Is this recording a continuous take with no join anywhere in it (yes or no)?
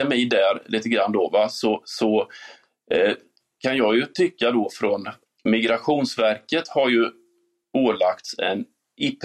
no